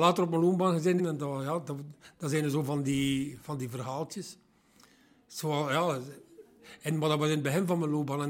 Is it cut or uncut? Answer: cut